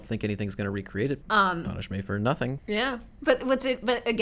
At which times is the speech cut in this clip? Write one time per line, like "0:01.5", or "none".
0:01.2
0:02.6